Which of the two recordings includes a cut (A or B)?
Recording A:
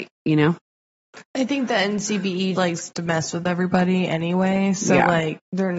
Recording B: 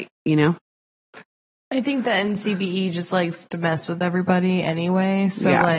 A